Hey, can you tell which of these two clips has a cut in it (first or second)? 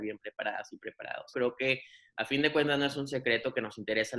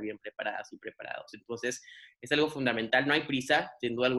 first